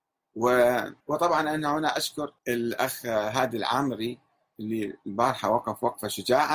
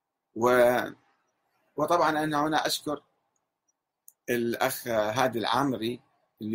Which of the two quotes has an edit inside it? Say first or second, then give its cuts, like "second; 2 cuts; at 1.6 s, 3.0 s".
first; 2 cuts; at 1.0 s, 2.4 s